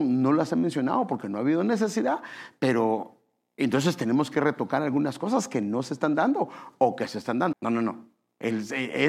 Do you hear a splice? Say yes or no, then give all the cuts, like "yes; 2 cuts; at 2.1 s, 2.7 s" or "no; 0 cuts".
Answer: yes; 1 cut; at 7.5 s